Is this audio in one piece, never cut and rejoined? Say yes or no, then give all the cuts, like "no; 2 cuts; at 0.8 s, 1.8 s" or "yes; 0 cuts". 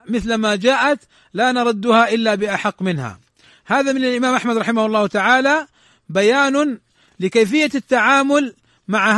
yes; 0 cuts